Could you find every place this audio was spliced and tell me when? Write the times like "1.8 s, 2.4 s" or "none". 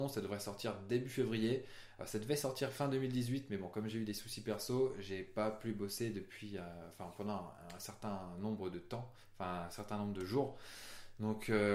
none